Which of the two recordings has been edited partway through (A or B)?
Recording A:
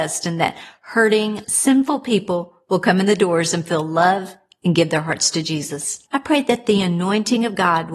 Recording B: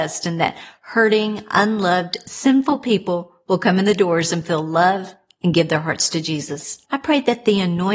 A